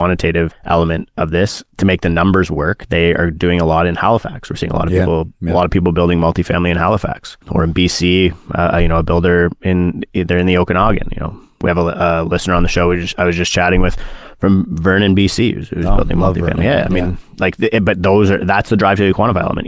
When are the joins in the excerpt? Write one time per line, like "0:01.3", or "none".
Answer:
none